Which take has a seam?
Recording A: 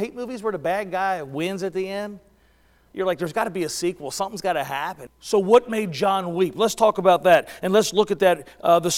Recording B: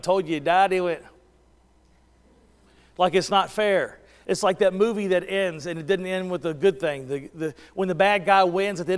A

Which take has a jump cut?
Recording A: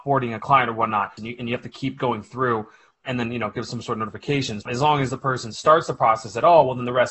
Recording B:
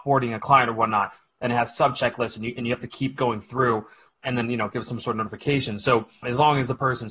A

